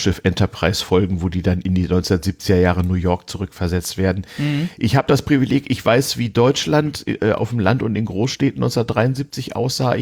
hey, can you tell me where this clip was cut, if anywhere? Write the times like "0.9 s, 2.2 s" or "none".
none